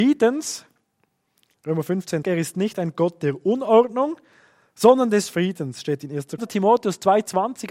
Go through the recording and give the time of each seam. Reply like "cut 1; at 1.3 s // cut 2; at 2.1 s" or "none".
cut 1; at 2.2 s // cut 2; at 6.4 s